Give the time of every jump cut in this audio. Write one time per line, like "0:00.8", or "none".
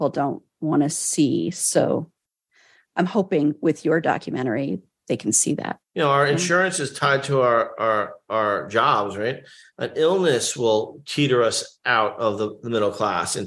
0:05.8